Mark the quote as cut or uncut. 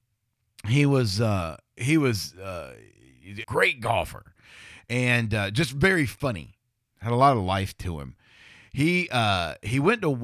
cut